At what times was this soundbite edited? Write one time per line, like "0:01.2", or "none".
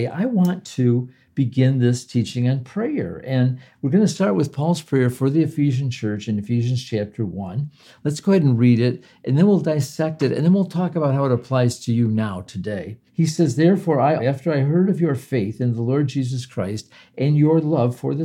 0:13.1
0:14.2

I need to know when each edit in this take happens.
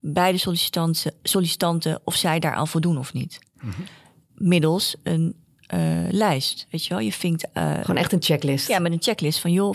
none

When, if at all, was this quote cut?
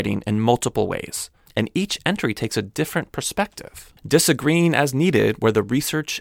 0:01.5

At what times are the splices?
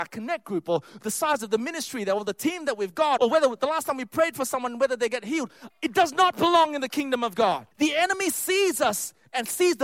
0:03.2
0:05.7
0:07.7

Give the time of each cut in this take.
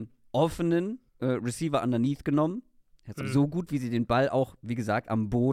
0:01.1
0:03.2

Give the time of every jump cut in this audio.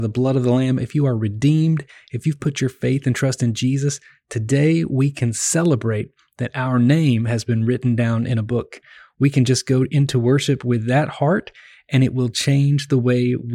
none

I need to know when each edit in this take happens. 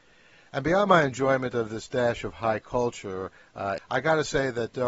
0:03.8

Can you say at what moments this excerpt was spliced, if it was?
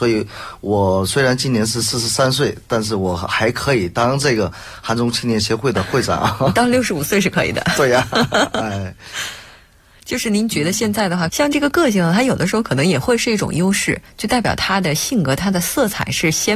0:11.3

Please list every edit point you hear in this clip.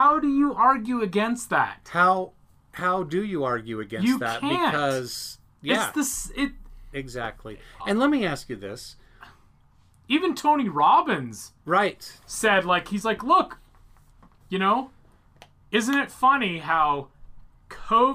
none

